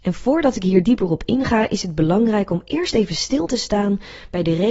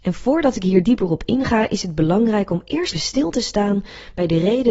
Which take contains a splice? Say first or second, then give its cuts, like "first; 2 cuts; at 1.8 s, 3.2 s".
second; 1 cut; at 2.9 s